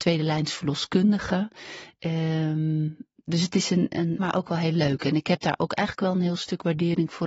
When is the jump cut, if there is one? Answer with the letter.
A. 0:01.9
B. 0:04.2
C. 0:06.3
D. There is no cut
B